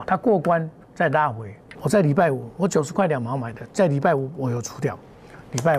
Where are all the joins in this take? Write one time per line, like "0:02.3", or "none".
0:01.7